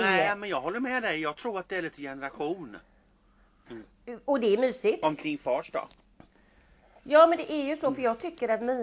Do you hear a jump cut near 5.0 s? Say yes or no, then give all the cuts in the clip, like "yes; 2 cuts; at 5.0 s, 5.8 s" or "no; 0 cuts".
yes; 2 cuts; at 3.7 s, 5.0 s